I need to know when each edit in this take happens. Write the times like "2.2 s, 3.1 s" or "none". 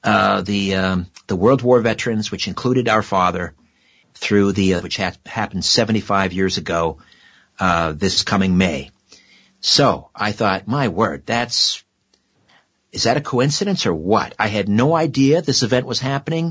4.8 s

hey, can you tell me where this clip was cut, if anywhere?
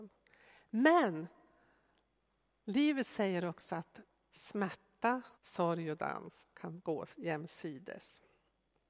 5.3 s

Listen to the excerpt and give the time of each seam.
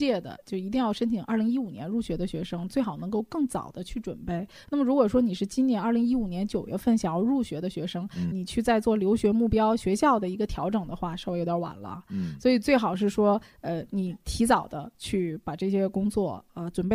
8.3 s

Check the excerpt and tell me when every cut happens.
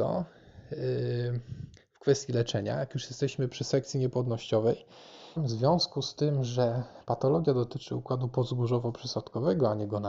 5.4 s

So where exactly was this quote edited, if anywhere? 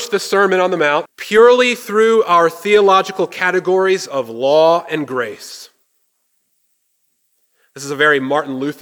1.1 s

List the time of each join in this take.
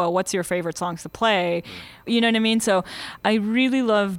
2.1 s, 3.2 s

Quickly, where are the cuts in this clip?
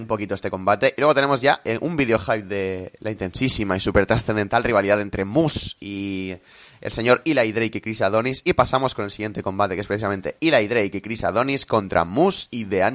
none

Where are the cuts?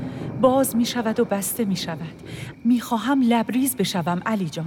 2.5 s

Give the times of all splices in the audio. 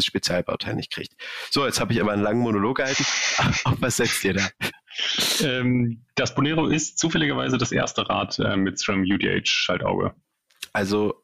none

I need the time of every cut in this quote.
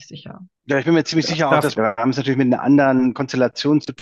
1.7 s

